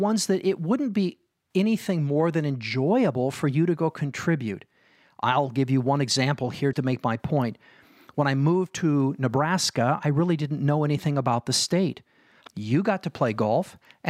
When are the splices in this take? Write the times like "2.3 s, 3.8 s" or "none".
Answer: 6.7 s, 12.5 s